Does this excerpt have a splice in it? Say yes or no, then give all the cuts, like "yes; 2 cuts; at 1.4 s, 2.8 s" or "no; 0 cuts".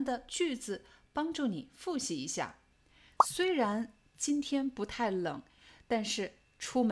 no; 0 cuts